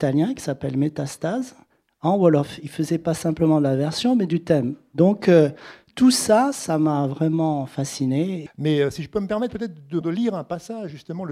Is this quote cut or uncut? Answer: cut